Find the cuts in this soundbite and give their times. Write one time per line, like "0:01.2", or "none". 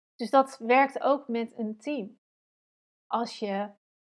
none